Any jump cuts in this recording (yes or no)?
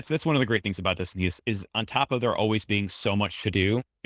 no